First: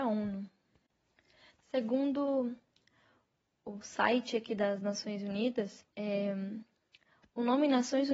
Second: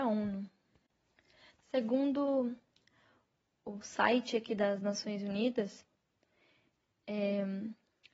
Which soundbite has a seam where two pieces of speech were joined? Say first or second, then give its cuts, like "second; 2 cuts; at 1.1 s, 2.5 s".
first; 1 cut; at 5.9 s